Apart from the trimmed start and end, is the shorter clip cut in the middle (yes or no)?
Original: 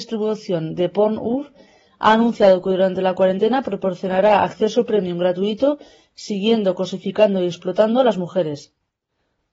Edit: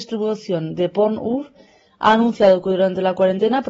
no